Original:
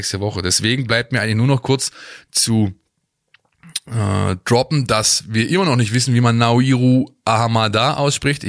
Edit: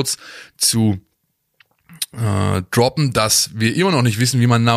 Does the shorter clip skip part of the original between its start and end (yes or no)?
no